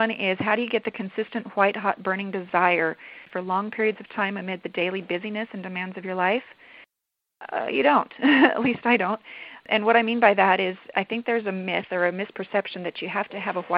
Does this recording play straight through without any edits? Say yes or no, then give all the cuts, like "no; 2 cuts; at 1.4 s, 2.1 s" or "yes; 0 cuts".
yes; 0 cuts